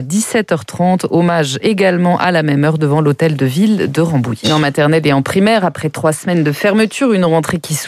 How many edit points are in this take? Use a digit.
1